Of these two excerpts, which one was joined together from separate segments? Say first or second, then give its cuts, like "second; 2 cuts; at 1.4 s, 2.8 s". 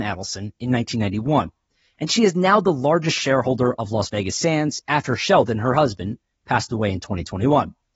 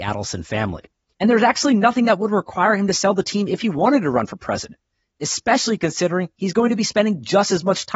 second; 1 cut; at 1.1 s